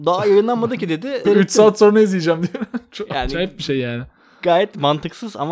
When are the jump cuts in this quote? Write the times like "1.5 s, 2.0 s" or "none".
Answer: 1.2 s